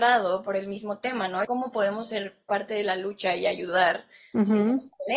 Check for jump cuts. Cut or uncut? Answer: cut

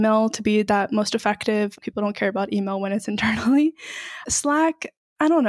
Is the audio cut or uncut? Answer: cut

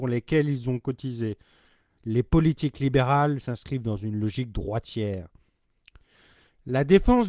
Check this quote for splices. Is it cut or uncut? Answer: cut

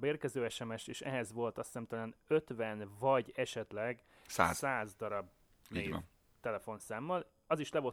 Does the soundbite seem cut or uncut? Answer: uncut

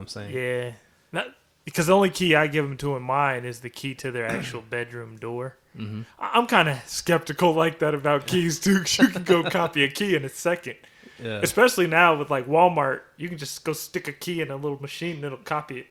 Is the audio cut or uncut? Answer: uncut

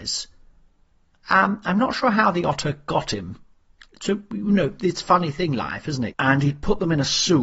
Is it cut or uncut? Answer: cut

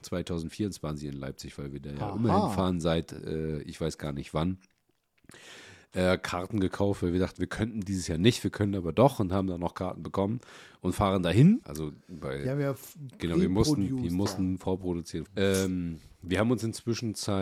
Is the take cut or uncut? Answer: cut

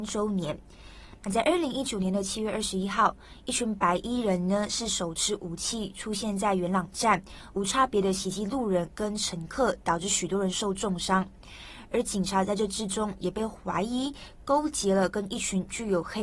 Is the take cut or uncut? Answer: uncut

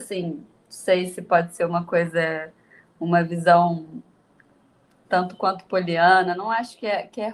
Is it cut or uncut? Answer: uncut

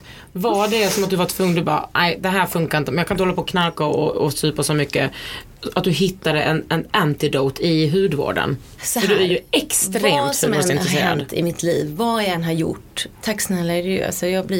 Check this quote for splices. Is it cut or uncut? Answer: uncut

